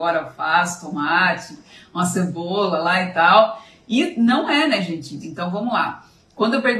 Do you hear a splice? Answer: yes; 1 cut; at 5.2 s

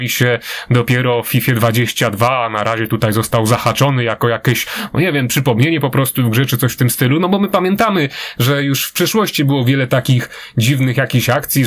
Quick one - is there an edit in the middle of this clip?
no; 0 cuts

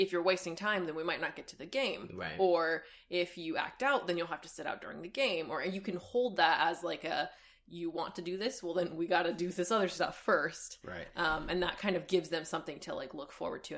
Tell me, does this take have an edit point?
no; 0 cuts

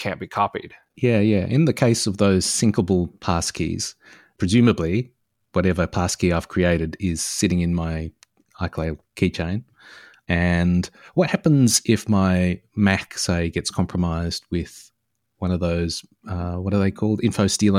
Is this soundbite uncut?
yes; 0 cuts

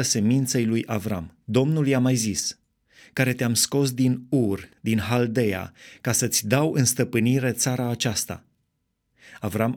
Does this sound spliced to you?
yes; 2 cuts; at 1.4 s, 3.0 s

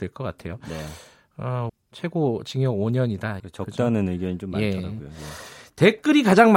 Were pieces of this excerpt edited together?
yes; 2 cuts; at 1.7 s, 3.4 s

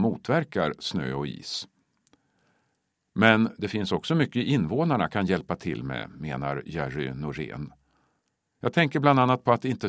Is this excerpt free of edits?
yes; 0 cuts

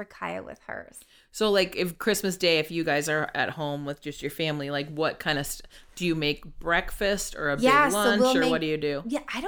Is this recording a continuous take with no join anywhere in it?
yes; 0 cuts

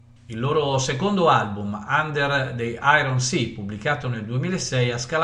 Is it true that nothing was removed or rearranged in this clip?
yes; 0 cuts

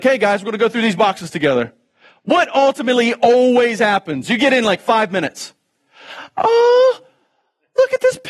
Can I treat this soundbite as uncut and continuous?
yes; 0 cuts

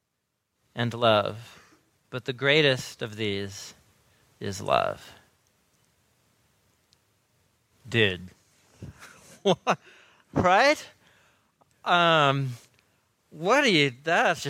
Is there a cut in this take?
no; 0 cuts

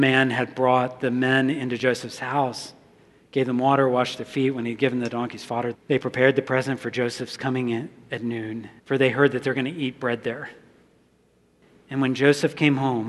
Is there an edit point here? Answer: yes; 2 cuts; at 5.7 s, 8.8 s

